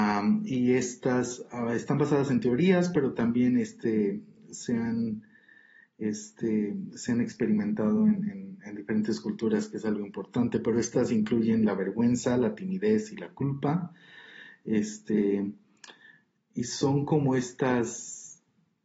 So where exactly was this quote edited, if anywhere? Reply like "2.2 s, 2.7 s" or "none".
none